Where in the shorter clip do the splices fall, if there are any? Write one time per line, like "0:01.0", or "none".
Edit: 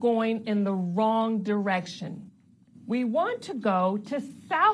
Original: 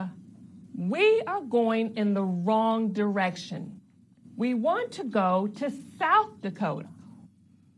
none

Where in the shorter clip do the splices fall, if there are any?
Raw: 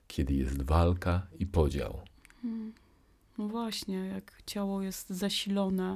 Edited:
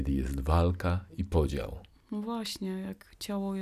0:02.0

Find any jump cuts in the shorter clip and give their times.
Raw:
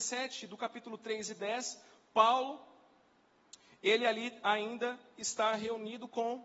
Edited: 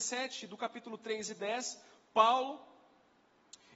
none

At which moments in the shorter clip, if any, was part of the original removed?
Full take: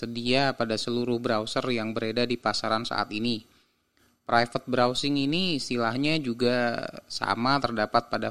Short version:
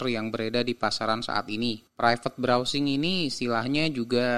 0:01.9

